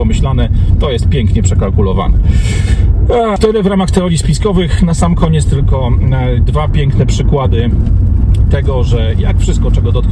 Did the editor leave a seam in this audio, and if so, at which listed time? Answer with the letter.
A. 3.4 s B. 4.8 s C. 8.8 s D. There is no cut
A